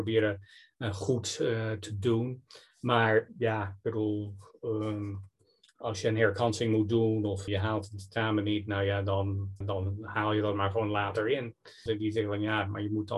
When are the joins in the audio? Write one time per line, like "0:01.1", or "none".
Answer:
0:07.5
0:09.6
0:11.9